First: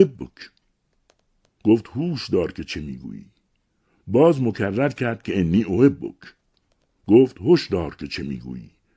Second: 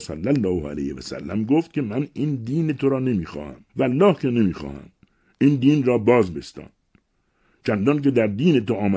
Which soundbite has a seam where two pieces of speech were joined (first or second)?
second